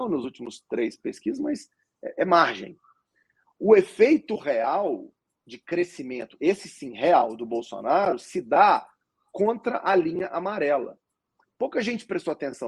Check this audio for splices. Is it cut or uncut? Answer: uncut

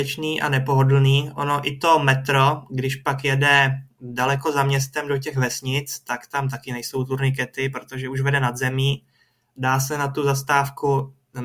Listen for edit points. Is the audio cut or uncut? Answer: uncut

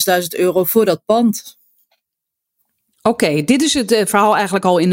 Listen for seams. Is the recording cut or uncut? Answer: uncut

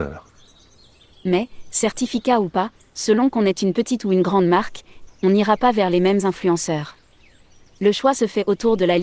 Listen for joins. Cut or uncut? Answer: cut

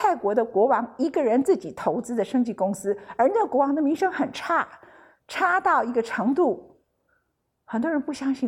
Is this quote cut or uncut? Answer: uncut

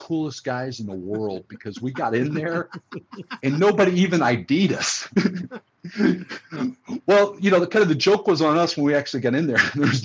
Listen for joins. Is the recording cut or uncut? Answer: uncut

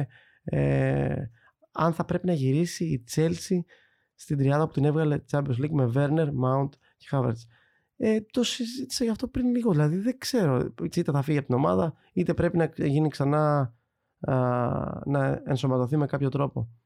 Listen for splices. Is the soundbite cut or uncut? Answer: cut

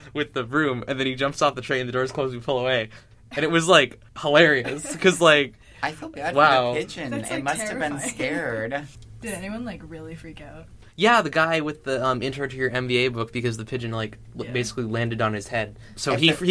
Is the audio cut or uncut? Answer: cut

